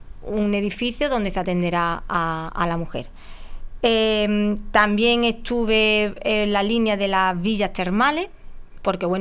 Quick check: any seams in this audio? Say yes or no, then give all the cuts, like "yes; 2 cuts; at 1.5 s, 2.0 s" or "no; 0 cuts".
no; 0 cuts